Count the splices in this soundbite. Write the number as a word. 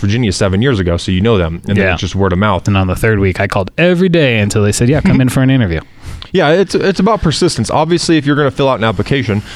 one